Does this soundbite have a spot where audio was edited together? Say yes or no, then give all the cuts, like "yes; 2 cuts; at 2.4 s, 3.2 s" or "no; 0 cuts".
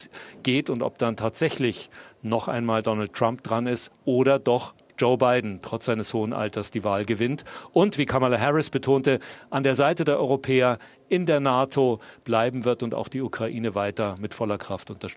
no; 0 cuts